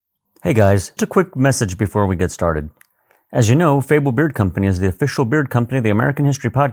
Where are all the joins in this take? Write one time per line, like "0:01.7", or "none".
0:01.0

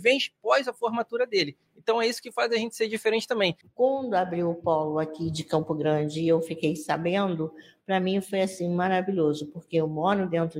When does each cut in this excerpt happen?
0:03.6

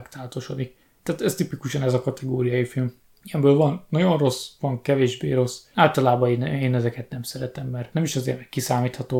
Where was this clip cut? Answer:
0:01.0

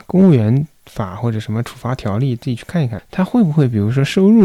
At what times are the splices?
0:03.0

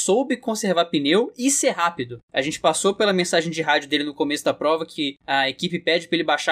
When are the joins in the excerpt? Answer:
none

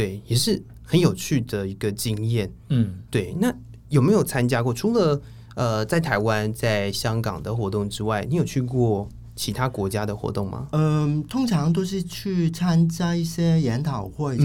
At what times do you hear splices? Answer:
none

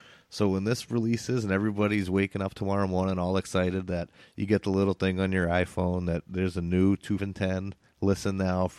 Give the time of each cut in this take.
0:07.2

